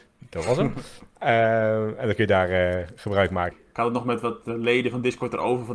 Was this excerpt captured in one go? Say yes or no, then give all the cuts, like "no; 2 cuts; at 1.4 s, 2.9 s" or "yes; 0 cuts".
no; 1 cut; at 3.5 s